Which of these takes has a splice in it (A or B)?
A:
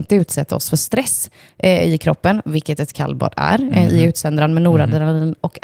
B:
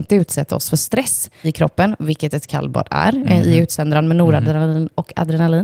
B